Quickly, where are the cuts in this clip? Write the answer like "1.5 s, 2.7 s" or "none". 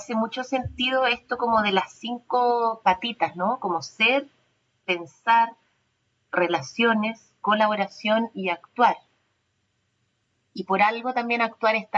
none